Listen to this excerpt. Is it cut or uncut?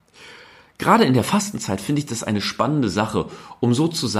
uncut